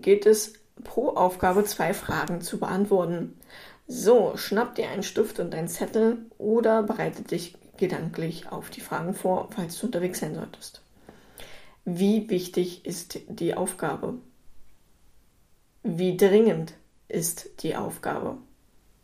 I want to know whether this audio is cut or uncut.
uncut